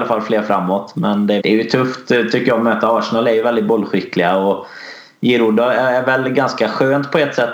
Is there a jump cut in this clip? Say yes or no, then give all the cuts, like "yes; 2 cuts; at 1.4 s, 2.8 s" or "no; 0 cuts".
yes; 1 cut; at 1.4 s